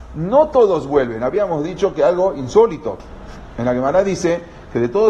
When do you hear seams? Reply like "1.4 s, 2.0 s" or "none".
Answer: none